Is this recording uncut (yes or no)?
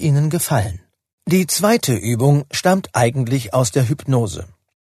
no